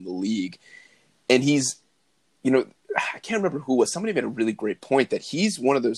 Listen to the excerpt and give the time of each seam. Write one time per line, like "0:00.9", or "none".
none